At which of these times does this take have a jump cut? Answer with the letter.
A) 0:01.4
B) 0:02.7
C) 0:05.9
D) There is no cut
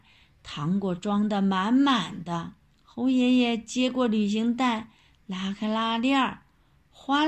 B